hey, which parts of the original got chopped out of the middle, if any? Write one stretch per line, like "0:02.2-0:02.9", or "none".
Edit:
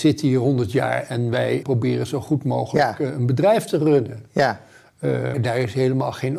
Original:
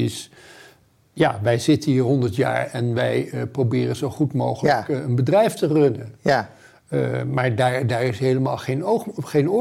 0:03.3-0:03.5
0:07.2-0:07.8